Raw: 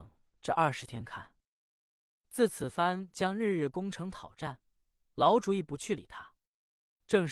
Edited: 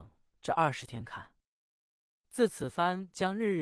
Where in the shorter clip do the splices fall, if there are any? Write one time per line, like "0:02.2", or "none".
none